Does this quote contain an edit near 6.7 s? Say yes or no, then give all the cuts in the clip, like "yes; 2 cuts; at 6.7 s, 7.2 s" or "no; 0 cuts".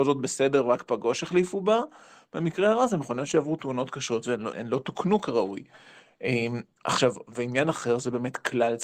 no; 1 cut; at 4.5 s